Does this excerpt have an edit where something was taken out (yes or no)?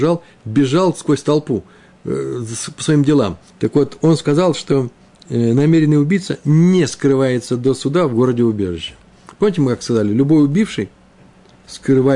yes